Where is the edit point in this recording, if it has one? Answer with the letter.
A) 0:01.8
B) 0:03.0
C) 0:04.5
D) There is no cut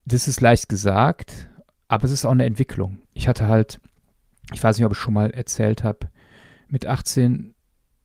B